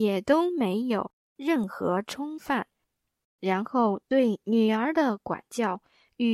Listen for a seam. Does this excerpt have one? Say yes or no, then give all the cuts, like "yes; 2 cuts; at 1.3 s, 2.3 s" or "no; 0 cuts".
yes; 1 cut; at 3.2 s